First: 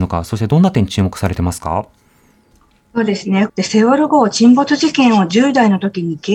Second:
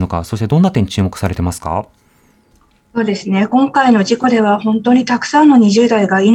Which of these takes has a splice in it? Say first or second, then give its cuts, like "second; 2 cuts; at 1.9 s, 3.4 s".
first; 1 cut; at 3.5 s